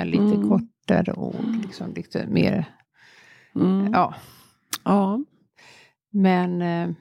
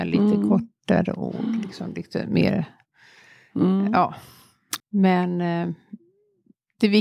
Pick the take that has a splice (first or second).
second